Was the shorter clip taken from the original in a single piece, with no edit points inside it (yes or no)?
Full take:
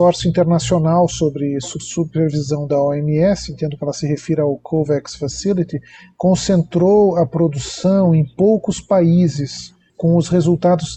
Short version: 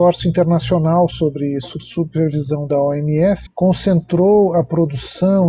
no